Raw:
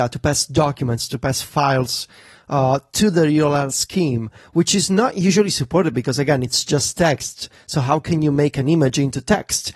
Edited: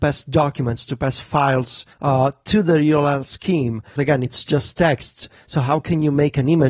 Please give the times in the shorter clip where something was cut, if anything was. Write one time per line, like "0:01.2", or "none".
0:01.9
0:04.0